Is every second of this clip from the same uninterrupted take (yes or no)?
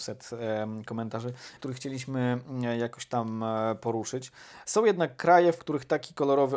no